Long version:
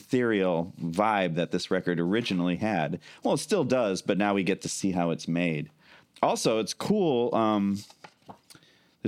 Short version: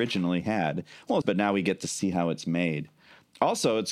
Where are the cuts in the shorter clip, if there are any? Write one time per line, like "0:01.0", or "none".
0:01.2